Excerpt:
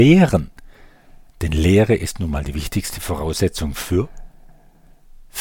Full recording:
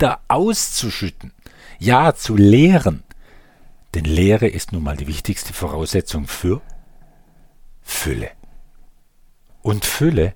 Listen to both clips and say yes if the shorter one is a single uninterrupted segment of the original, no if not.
yes